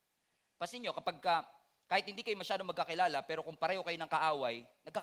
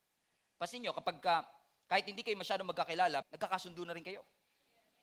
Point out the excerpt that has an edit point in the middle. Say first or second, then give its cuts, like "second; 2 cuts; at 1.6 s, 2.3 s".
second; 1 cut; at 3.2 s